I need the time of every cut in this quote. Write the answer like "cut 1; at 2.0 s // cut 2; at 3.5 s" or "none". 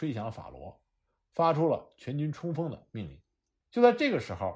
cut 1; at 3.6 s